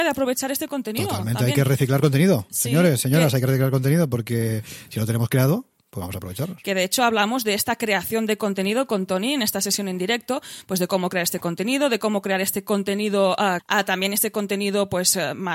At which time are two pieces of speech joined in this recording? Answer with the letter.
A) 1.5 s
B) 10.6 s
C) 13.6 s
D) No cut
C